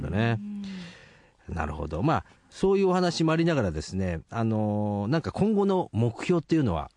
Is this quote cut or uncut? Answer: uncut